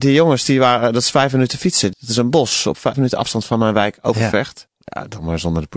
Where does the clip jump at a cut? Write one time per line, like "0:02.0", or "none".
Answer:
0:01.9
0:02.9
0:04.7